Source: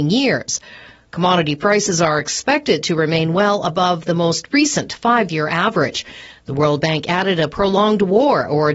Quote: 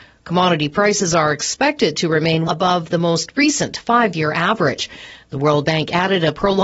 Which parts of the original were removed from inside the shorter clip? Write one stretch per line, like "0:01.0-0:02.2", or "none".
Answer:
0:03.3-0:03.6